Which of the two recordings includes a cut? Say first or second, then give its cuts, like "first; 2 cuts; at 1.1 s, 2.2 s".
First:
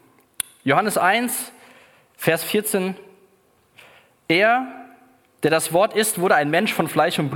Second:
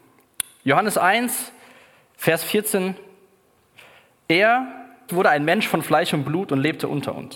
second; 1 cut; at 5.1 s